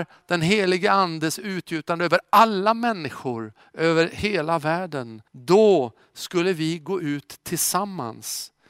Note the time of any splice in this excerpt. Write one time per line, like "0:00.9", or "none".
0:05.3